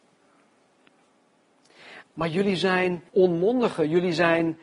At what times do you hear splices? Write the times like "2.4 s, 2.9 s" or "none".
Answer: 2.0 s, 3.1 s